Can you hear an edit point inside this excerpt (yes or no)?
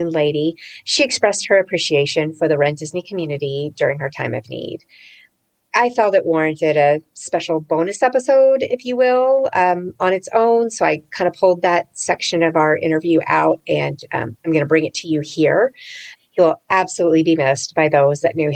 yes